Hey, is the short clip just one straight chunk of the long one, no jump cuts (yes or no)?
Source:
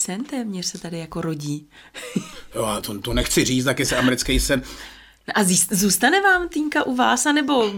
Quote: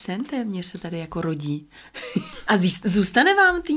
no